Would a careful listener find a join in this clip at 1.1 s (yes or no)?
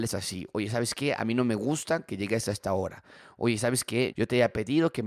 no